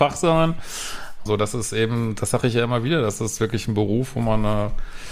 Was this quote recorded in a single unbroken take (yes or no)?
no